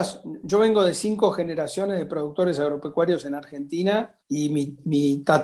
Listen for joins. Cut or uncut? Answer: cut